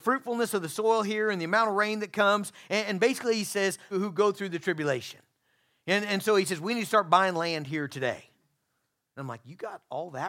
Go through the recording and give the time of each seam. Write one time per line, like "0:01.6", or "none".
0:03.9